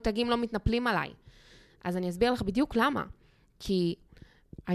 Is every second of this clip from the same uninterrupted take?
yes; 0 cuts

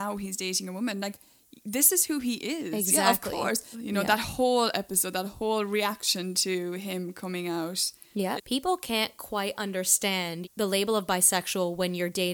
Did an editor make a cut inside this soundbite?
yes; 3 cuts; at 3.7 s, 8.4 s, 10.4 s

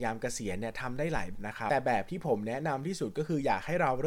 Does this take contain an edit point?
yes; 1 cut; at 1.3 s

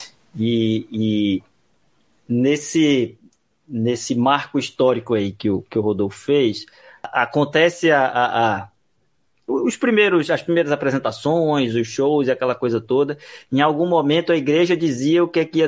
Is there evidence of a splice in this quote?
no; 0 cuts

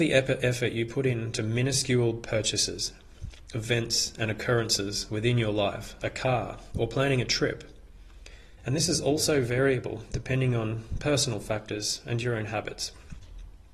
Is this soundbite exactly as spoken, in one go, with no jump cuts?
no; 2 cuts; at 6.0 s, 8.6 s

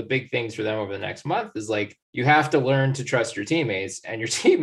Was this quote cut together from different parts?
yes; 1 cut; at 2.0 s

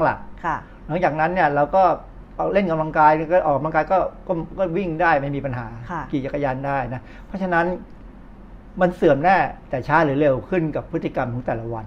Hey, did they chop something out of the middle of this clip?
no; 0 cuts

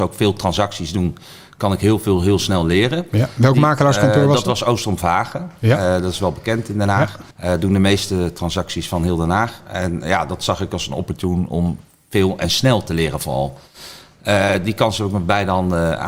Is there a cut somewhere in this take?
yes; 1 cut; at 7.3 s

